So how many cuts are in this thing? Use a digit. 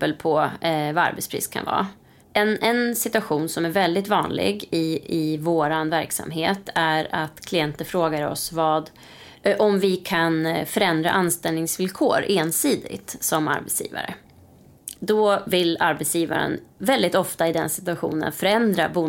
1